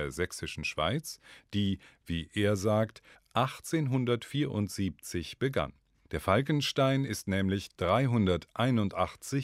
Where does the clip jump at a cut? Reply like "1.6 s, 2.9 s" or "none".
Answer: 3.1 s, 6.1 s